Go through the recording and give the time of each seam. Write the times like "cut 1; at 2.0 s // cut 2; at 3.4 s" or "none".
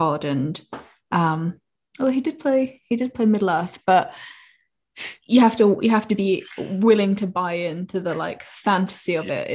none